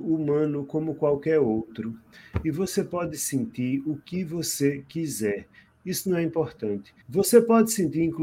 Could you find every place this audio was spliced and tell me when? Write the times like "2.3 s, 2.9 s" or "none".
7.0 s